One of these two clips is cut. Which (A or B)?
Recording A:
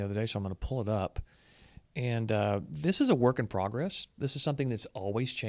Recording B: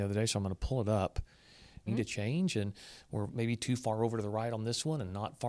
B